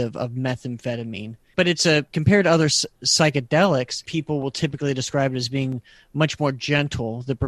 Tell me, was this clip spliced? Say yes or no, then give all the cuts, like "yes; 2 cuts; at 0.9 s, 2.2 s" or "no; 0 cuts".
yes; 1 cut; at 1.5 s